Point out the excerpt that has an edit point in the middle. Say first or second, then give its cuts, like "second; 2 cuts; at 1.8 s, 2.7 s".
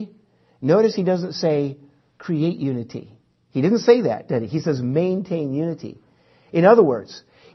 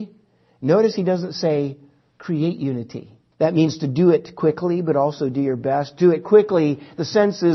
second; 1 cut; at 3.3 s